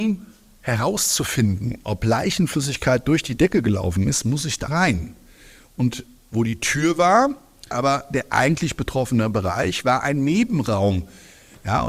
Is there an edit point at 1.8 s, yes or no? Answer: no